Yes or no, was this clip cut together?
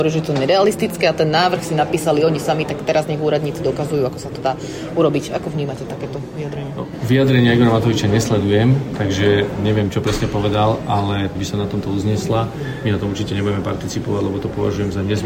yes